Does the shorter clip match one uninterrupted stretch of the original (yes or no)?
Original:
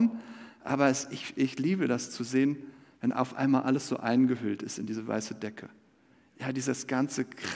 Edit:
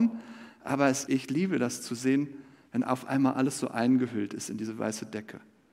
no